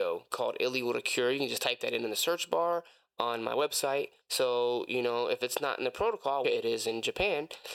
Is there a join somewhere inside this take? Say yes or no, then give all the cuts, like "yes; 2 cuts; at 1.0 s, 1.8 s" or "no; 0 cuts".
yes; 2 cuts; at 4.2 s, 6.4 s